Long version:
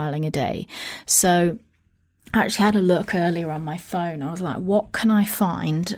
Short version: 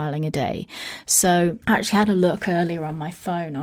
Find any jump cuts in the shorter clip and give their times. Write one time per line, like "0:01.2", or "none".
0:01.6